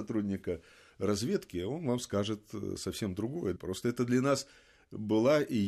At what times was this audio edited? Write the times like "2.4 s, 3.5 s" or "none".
3.6 s